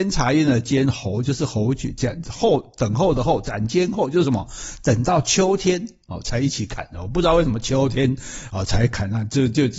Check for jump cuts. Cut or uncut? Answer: uncut